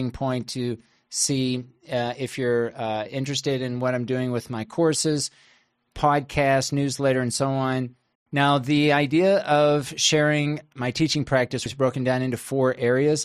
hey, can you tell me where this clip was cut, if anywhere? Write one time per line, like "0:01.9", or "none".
0:08.2
0:11.7